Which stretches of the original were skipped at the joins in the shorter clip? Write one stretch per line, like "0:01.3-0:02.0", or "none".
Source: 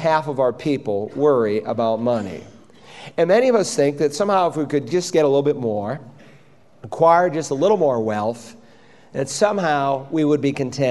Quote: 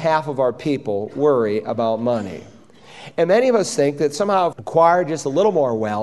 0:04.5-0:06.8